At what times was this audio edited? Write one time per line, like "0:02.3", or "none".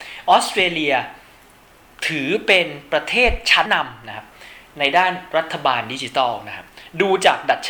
0:03.7